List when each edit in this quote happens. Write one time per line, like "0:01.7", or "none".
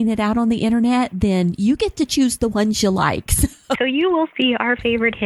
0:03.8